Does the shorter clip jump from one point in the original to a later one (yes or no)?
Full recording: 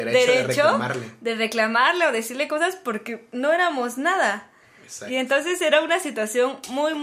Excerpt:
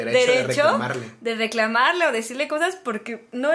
no